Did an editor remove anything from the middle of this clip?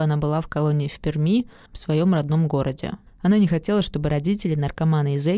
yes; 2 cuts; at 1.7 s, 3.1 s

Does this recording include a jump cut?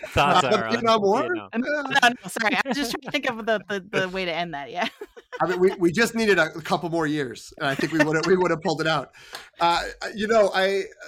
no; 0 cuts

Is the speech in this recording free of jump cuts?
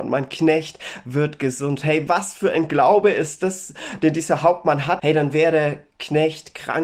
no; 1 cut; at 5.0 s

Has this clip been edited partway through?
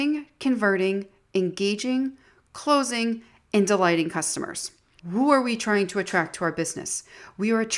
yes; 1 cut; at 5.0 s

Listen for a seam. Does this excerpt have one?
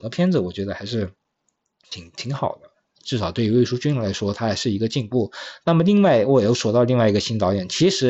no; 0 cuts

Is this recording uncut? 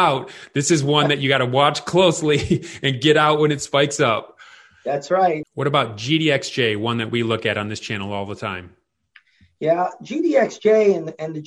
no; 1 cut; at 5.4 s

